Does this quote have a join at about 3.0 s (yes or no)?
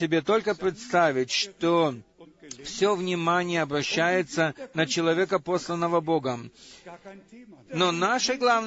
no